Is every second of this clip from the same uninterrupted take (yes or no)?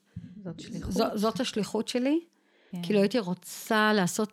no